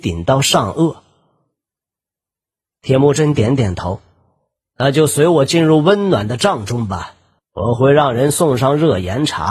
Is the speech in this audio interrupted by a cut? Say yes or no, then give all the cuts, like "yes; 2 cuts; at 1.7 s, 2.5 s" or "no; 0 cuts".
no; 0 cuts